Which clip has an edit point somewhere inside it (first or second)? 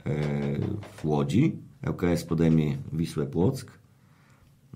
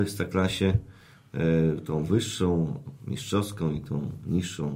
first